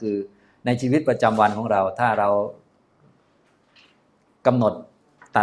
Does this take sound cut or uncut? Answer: uncut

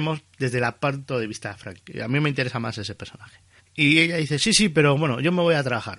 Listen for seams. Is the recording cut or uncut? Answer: cut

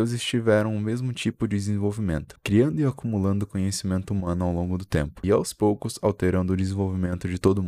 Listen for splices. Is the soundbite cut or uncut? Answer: cut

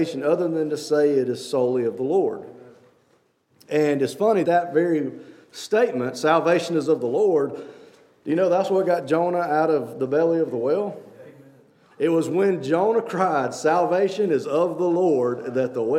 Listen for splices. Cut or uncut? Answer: cut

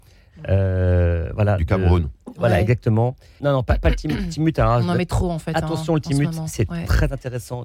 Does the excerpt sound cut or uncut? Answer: cut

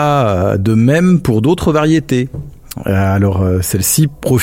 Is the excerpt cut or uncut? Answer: uncut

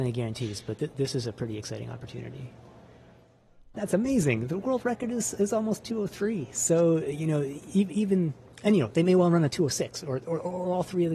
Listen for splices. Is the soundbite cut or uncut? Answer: cut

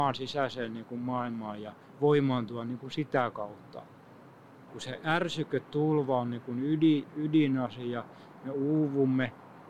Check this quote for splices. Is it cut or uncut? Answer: cut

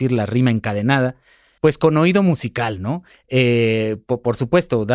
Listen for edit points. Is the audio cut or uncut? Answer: cut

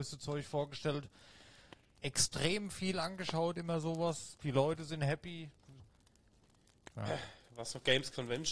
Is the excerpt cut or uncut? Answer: cut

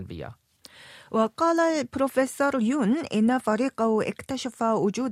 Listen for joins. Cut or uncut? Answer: uncut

